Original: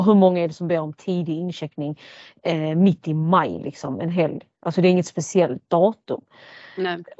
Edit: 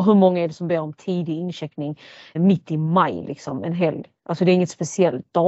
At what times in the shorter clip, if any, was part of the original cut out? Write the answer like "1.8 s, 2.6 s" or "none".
2.4 s